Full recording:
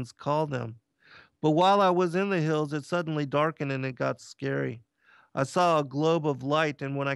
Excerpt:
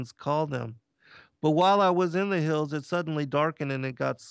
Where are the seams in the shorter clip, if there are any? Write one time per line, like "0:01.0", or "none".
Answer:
none